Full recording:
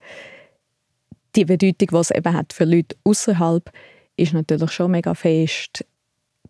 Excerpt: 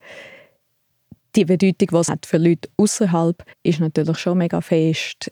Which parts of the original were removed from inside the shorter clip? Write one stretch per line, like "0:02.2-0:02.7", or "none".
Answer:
0:02.1-0:02.4
0:03.8-0:04.1